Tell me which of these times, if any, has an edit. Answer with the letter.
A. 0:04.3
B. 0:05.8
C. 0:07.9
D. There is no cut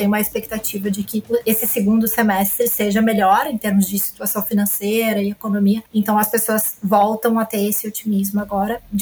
D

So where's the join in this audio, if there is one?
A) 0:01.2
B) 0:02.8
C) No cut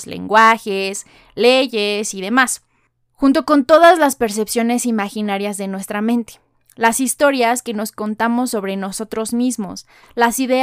C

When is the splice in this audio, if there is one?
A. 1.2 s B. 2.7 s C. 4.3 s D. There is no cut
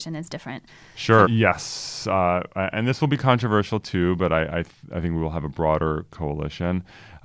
A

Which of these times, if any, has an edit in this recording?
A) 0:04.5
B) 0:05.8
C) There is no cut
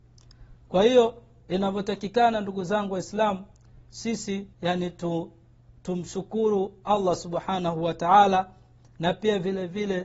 A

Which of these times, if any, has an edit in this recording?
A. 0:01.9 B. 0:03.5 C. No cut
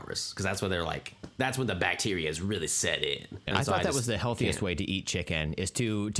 B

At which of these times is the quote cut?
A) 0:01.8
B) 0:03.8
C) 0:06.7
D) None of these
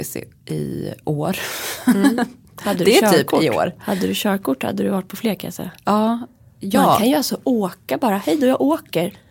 D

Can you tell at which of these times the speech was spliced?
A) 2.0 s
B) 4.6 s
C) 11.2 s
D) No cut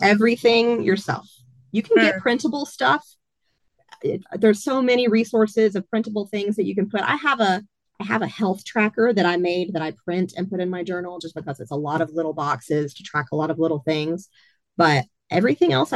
D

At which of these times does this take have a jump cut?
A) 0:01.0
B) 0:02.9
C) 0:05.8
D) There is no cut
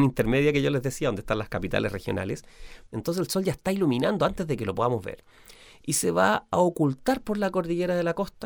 B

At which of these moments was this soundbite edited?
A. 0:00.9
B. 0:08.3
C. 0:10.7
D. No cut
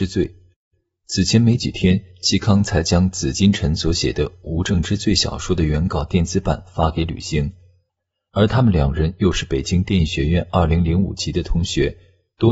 B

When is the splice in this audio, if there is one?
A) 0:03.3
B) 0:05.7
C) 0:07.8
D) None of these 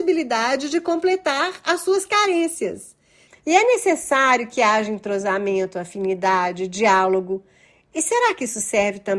A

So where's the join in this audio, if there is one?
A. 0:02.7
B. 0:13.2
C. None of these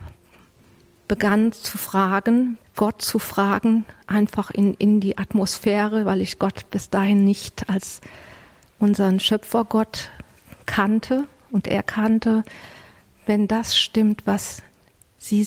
A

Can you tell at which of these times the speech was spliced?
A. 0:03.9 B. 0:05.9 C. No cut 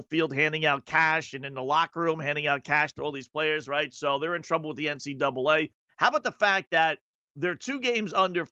B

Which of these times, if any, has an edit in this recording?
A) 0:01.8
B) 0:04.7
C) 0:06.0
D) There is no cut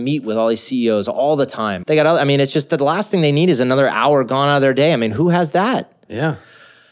A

